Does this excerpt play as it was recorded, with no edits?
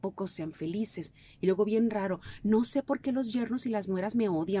yes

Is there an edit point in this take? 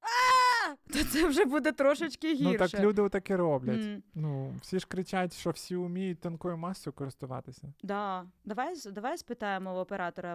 yes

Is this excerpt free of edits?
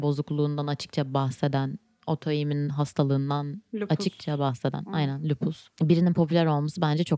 yes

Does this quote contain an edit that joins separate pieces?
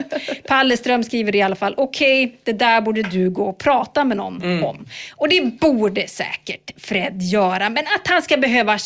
no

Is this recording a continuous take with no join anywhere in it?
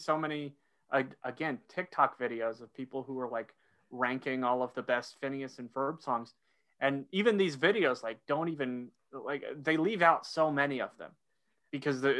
yes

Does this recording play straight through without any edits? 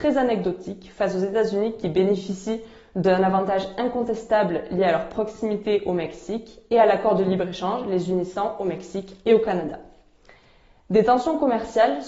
yes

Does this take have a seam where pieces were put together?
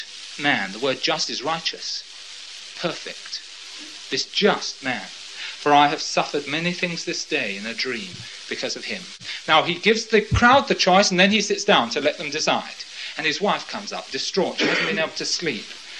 no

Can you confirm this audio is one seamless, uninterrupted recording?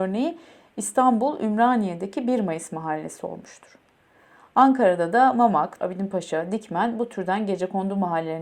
no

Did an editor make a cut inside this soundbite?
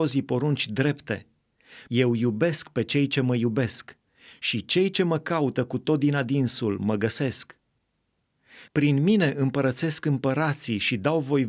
yes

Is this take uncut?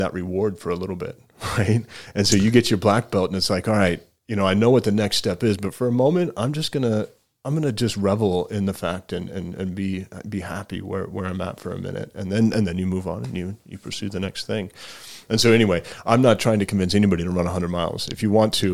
yes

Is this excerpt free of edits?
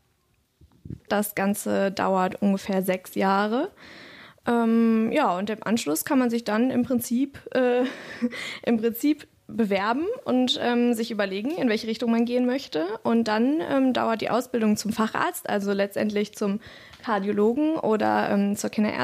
no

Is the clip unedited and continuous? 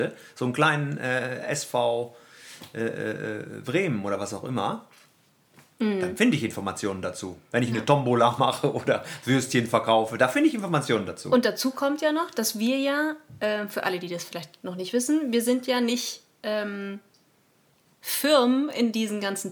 yes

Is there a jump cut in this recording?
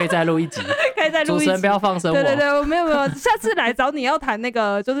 no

